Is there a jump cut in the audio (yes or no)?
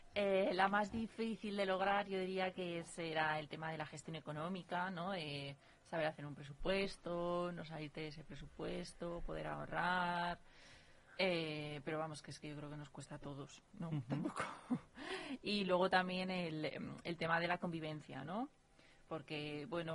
no